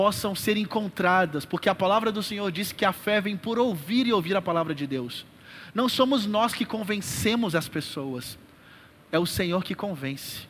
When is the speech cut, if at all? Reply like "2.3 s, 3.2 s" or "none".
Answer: none